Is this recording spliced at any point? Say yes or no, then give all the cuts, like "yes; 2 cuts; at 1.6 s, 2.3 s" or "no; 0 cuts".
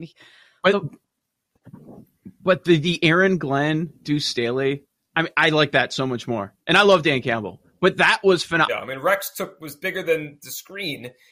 yes; 1 cut; at 8.7 s